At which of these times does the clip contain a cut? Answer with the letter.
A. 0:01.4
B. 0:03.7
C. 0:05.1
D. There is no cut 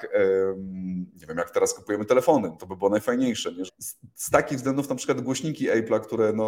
B